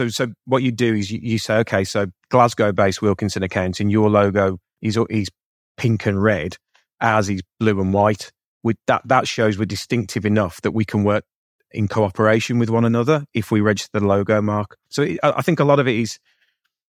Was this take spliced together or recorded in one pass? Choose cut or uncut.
uncut